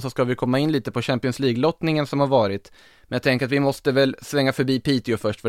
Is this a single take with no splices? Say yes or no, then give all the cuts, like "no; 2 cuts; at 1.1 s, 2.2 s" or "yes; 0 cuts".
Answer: yes; 0 cuts